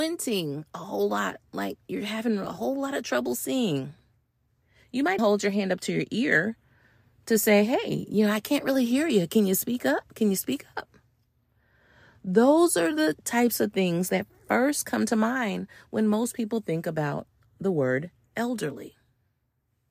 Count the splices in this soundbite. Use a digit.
1